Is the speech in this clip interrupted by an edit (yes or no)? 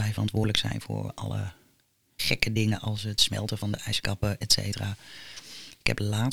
no